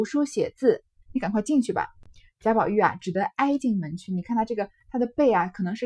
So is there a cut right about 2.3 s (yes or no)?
no